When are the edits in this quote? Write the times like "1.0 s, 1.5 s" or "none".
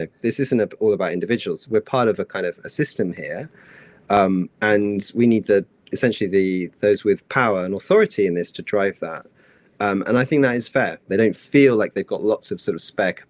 11.1 s